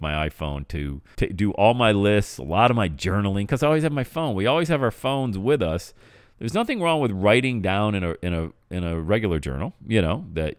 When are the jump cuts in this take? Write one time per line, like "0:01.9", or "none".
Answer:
0:01.1